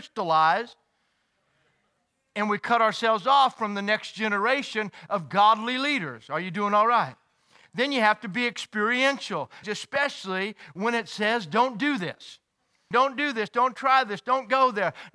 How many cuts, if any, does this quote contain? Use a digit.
2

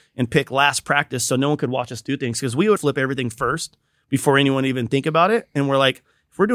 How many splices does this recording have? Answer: 1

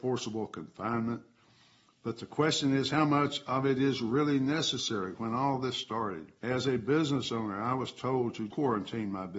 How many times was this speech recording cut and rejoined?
2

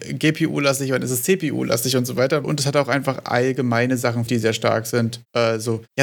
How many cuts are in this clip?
2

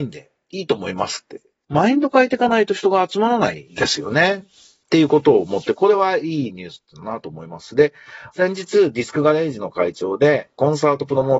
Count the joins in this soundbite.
0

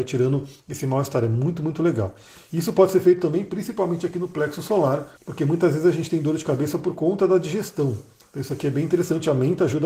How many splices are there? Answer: 1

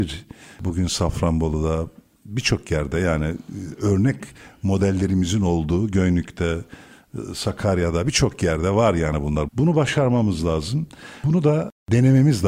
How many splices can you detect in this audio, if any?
1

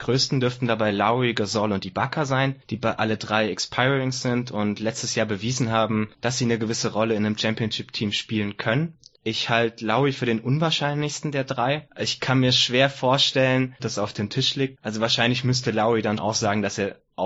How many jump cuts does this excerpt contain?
3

